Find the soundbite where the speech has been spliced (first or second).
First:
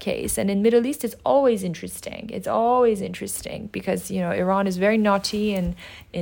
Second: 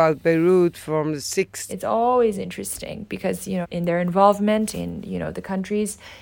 second